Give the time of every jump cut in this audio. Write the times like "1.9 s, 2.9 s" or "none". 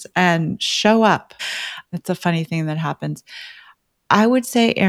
1.4 s

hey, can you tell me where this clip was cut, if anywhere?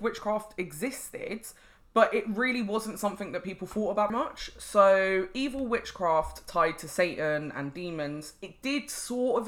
4.1 s

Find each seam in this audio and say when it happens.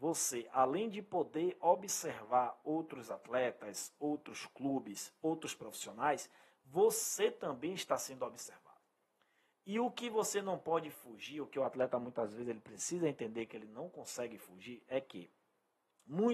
none

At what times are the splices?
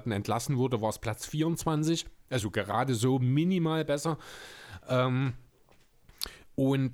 none

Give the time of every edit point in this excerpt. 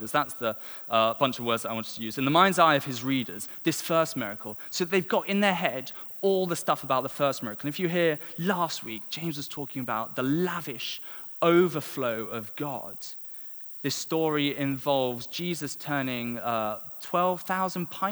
none

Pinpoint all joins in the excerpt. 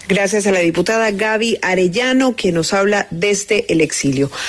none

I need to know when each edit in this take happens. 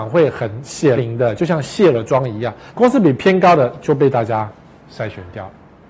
1.0 s, 2.7 s

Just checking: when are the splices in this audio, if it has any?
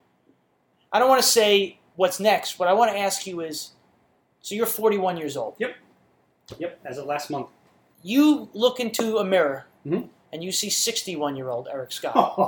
none

